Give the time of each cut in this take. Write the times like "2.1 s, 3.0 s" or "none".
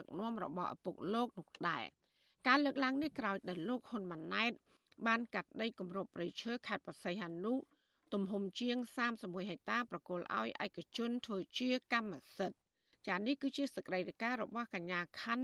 none